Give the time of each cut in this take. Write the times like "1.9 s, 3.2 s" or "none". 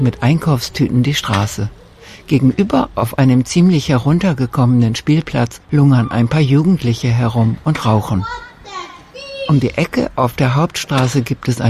none